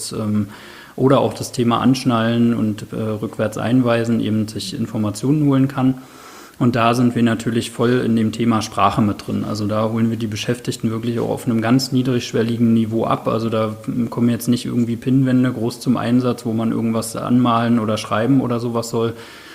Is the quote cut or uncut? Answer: uncut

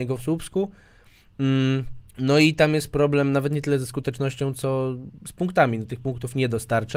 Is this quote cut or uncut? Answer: cut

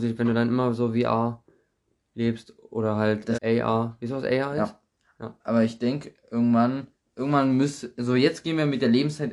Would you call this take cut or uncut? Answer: cut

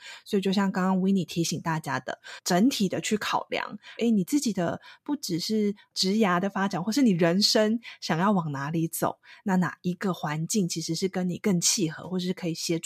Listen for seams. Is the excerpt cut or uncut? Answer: cut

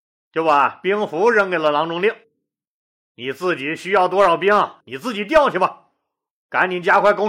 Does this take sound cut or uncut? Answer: uncut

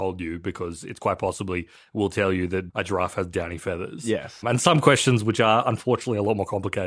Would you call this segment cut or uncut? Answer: uncut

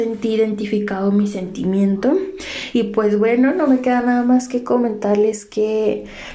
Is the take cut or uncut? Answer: uncut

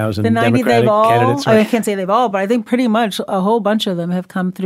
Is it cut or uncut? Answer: uncut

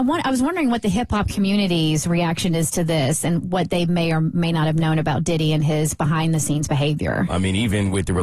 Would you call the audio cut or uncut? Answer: cut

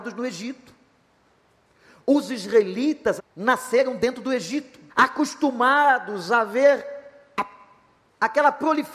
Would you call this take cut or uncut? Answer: cut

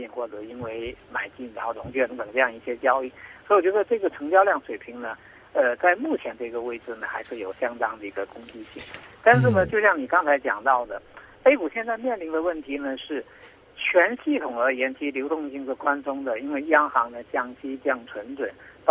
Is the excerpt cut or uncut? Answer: cut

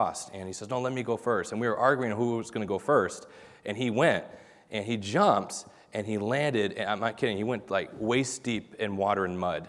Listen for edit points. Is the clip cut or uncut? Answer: uncut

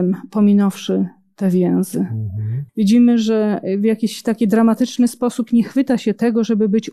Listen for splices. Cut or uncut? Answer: cut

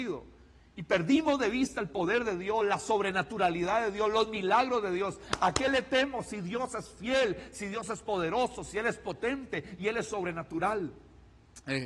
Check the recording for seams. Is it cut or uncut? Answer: uncut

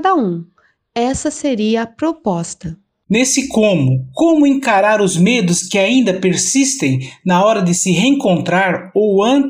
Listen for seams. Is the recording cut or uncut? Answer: uncut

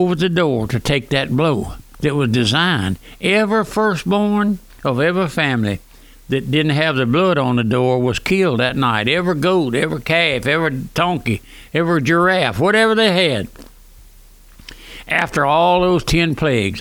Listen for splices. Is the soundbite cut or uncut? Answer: uncut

